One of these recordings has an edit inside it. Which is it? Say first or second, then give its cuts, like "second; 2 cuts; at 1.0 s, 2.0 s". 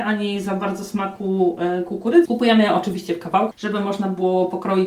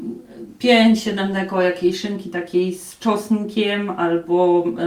first; 2 cuts; at 2.3 s, 3.5 s